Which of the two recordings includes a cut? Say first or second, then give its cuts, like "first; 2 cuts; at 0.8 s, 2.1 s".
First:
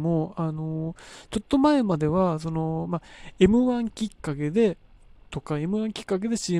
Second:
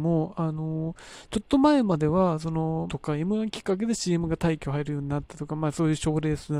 second; 1 cut; at 2.9 s